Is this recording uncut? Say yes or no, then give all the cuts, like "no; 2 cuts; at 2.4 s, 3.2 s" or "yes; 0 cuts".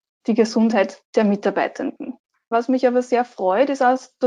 no; 1 cut; at 2.5 s